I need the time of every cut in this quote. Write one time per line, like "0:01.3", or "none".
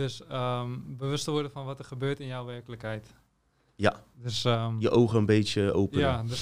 none

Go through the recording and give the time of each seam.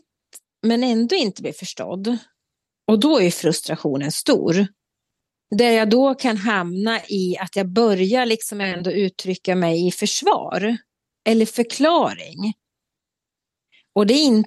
none

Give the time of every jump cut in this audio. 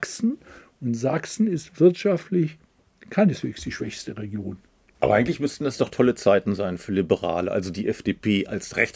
0:04.9

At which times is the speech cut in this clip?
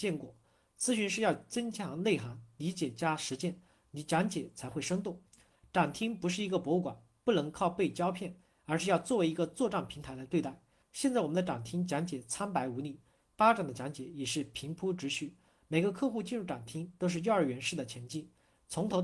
0:10.8

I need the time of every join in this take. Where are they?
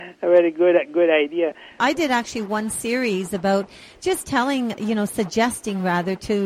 0:01.8

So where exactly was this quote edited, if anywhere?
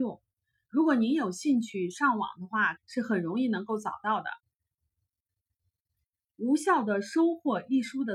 0:02.8

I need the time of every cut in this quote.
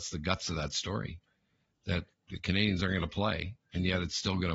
0:02.3

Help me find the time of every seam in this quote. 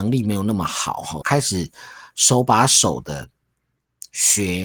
0:01.2

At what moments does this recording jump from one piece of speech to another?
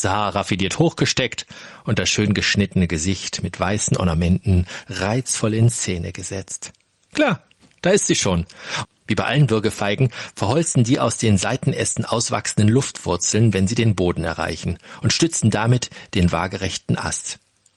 0:08.8

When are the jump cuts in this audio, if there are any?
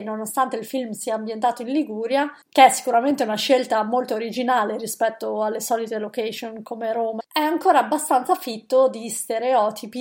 0:02.4
0:07.2

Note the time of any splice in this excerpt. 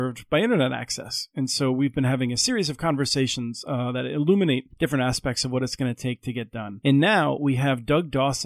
none

